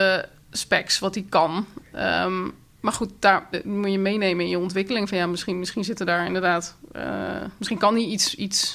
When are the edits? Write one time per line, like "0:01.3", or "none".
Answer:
0:03.5